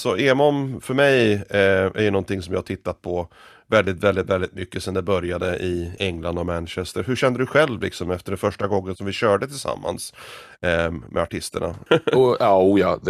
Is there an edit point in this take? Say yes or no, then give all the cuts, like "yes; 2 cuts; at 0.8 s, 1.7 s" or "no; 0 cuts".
yes; 2 cuts; at 6.0 s, 11.9 s